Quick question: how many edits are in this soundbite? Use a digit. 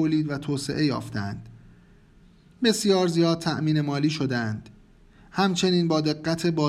0